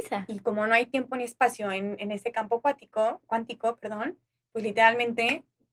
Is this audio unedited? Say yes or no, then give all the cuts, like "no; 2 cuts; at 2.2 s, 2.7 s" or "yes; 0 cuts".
yes; 0 cuts